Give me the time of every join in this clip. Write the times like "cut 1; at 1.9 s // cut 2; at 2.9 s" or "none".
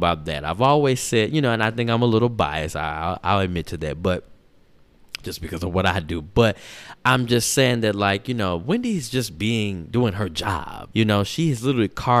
cut 1; at 10.9 s